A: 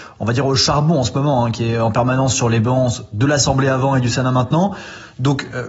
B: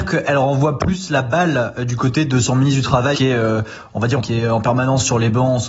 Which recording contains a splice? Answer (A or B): B